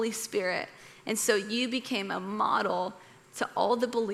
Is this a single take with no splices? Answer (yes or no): yes